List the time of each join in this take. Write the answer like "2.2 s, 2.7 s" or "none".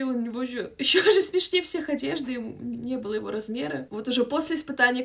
3.9 s